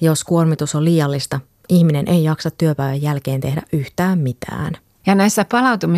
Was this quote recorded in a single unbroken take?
no; 1 cut; at 5.0 s

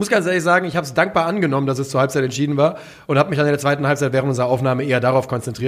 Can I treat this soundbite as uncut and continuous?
yes; 0 cuts

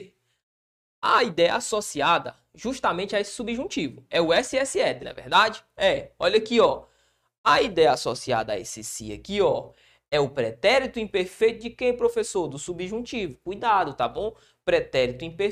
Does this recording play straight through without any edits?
no; 1 cut; at 5.0 s

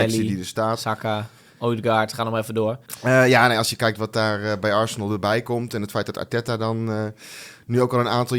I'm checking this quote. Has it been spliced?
no; 0 cuts

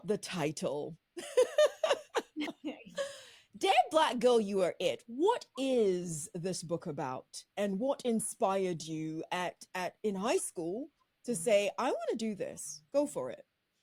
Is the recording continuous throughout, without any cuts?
yes; 0 cuts

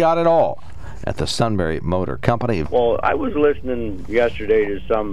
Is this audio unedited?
no; 1 cut; at 2.6 s

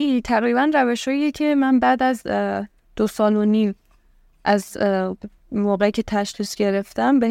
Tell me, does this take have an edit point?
no; 0 cuts

